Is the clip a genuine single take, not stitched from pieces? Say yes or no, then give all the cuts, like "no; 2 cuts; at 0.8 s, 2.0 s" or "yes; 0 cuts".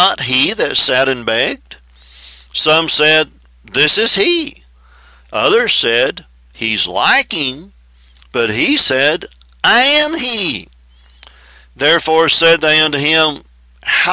yes; 0 cuts